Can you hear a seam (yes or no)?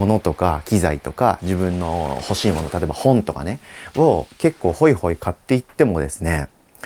no